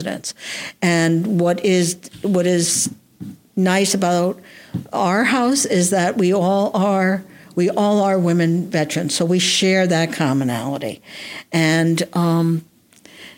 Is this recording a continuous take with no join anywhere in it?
yes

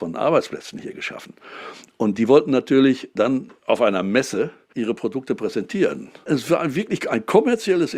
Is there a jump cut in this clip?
no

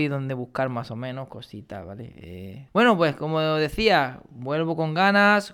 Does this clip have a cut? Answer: yes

